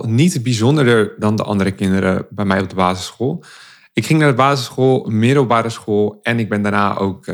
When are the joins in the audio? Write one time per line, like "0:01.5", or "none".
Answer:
none